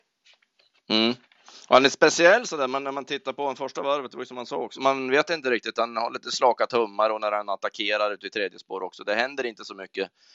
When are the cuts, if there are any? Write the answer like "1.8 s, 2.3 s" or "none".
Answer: 4.7 s